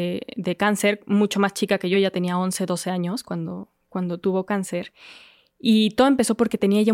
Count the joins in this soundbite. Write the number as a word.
zero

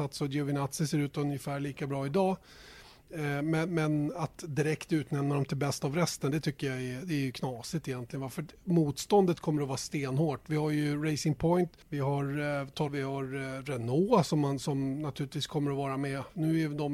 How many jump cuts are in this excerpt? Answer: two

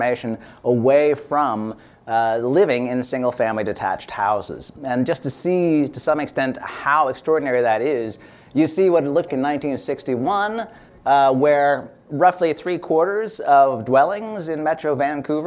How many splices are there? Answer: one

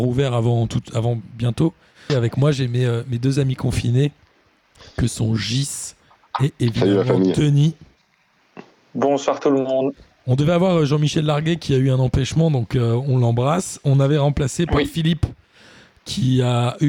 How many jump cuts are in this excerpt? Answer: one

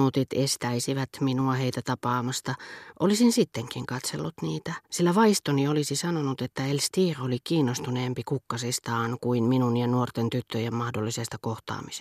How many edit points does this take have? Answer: one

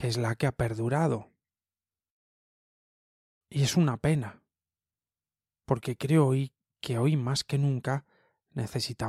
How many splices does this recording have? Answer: one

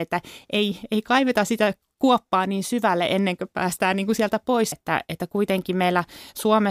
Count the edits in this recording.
one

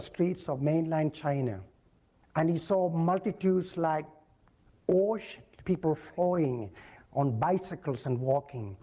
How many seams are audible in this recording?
one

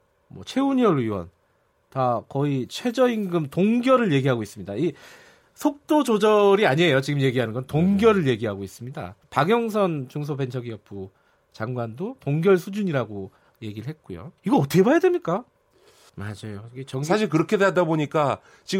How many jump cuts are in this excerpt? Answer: two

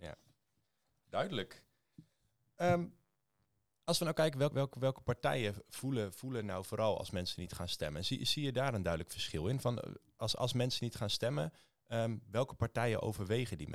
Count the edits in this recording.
one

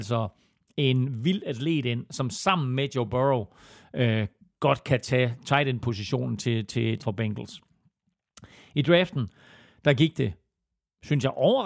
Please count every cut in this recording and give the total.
one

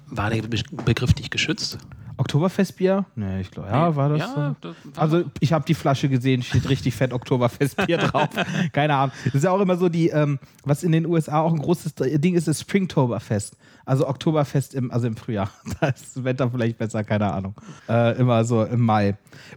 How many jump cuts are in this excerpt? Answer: one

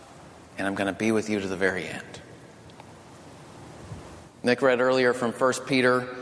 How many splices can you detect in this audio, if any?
one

